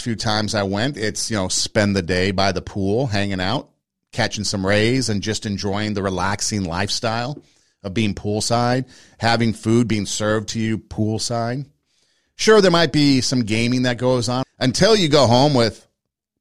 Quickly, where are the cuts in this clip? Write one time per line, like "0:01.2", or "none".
0:14.4

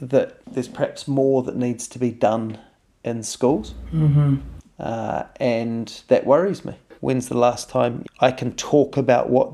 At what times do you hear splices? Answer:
0:07.0
0:08.0

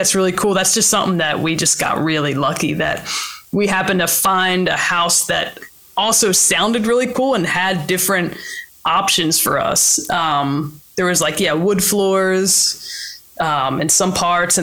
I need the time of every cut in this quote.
none

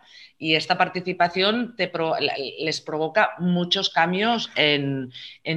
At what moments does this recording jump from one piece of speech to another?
none

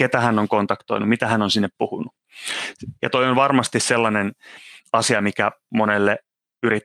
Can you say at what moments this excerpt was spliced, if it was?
0:03.0

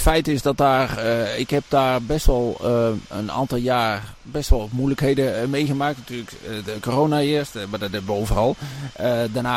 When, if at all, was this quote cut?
none

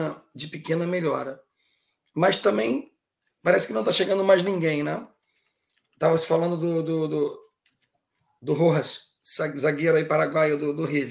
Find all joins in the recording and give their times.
none

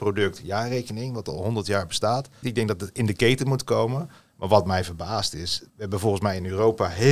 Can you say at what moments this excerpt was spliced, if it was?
0:02.4
0:05.7

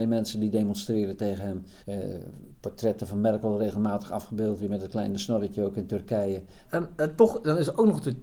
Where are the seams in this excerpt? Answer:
0:01.8
0:06.6

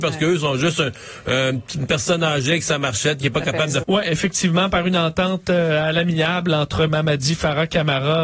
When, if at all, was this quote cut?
0:03.8

